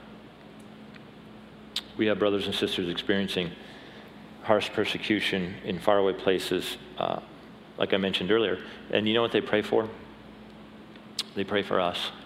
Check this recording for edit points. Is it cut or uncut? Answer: uncut